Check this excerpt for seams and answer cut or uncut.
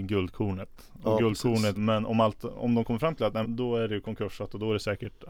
cut